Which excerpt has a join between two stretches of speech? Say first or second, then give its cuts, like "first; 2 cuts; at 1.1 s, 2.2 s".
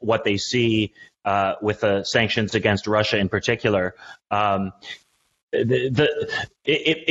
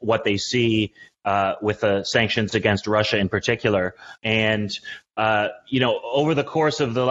second; 1 cut; at 4.2 s